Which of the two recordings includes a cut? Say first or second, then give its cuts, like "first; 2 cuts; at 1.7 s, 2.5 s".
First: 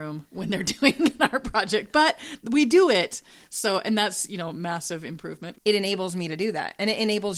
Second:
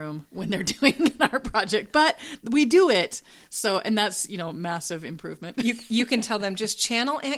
first; 1 cut; at 5.5 s